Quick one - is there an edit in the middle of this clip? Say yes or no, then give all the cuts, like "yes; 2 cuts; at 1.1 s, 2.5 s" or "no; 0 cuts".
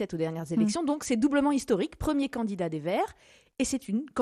no; 0 cuts